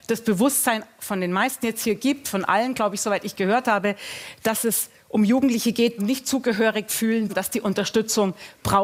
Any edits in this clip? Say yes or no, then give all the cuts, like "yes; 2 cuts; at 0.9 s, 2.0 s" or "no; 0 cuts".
yes; 2 cuts; at 6.0 s, 7.3 s